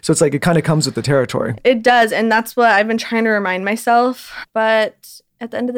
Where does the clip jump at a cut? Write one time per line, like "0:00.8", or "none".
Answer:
0:01.6